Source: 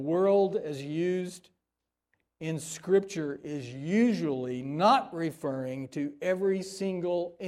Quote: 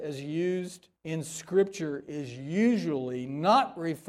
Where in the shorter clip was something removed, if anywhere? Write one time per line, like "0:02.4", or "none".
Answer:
0:01.0